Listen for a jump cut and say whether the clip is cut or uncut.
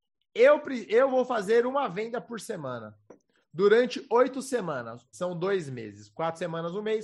cut